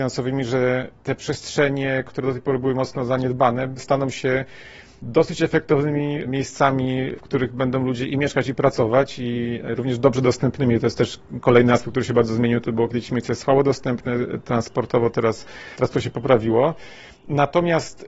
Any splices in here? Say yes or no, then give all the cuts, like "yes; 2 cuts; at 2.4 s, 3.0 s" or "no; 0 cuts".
no; 0 cuts